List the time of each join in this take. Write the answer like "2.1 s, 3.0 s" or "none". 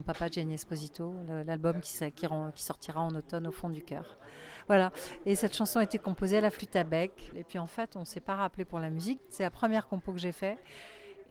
7.3 s, 9.2 s